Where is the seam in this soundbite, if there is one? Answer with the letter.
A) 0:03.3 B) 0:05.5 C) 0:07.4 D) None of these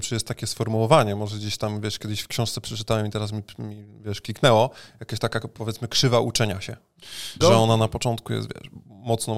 C